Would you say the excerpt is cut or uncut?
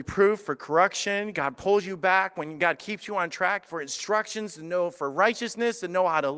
uncut